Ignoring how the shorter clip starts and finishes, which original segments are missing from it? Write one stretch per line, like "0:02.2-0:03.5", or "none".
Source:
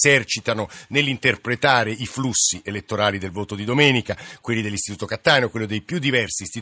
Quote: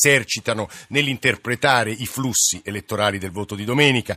none